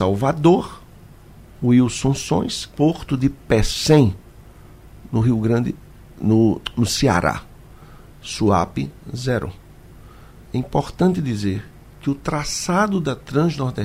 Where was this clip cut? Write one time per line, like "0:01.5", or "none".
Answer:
0:02.7